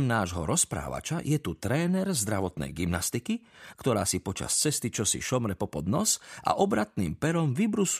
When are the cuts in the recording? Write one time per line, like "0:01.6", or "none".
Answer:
0:03.7